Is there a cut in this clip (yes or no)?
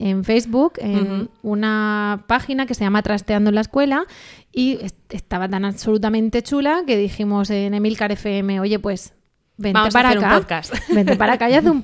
no